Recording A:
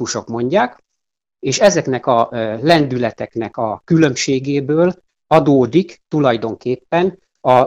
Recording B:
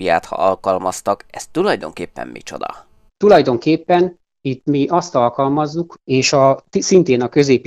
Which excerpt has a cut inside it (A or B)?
B